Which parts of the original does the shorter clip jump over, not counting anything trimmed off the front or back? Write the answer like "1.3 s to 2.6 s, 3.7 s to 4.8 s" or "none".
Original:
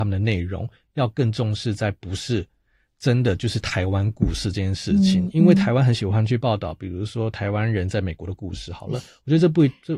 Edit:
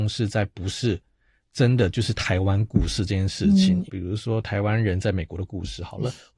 5.3 s to 6.7 s